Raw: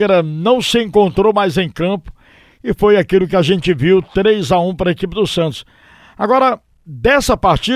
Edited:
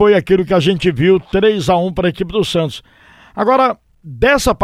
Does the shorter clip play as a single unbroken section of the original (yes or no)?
yes